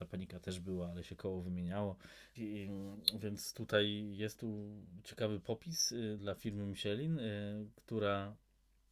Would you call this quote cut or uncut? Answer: cut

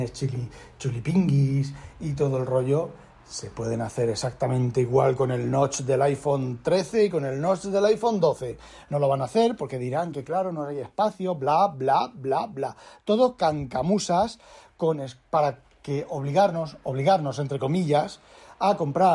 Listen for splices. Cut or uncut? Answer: uncut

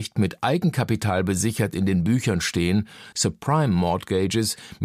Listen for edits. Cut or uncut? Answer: cut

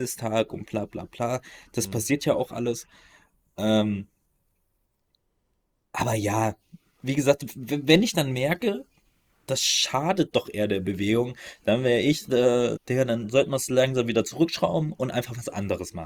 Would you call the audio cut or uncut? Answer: cut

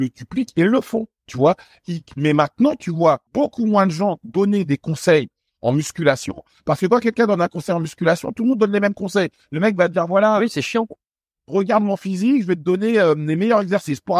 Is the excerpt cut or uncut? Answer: cut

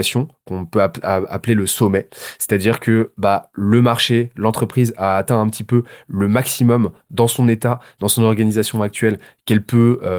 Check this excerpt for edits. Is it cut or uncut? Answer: uncut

